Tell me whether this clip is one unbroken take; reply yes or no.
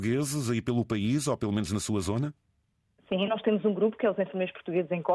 yes